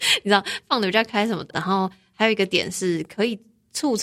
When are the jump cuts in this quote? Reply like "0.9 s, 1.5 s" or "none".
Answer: 1.5 s

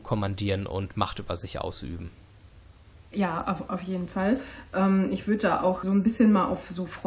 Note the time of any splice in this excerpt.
5.8 s

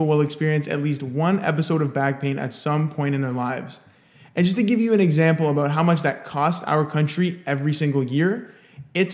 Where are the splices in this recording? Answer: none

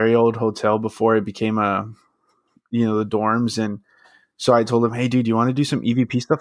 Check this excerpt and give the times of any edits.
none

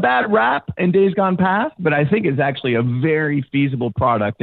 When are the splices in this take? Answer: none

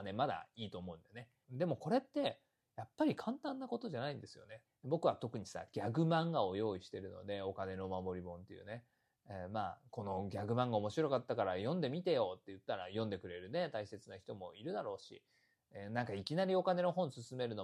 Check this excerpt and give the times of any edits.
1.4 s, 4.6 s

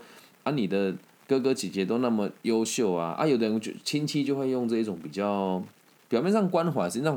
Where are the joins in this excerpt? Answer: none

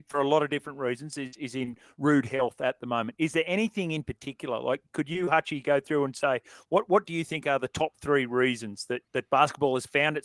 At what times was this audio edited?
9.0 s

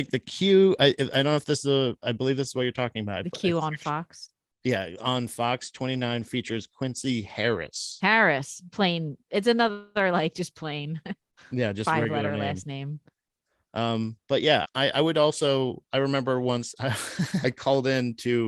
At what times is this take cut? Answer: 14.6 s, 17.4 s

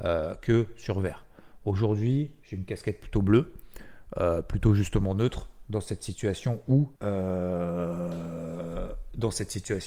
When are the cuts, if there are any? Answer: 7.0 s

